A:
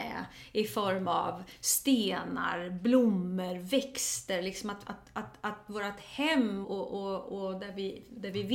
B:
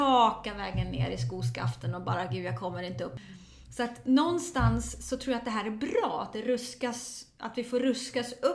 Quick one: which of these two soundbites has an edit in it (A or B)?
A